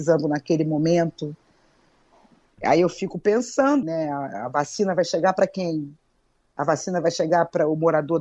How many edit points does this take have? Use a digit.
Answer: 1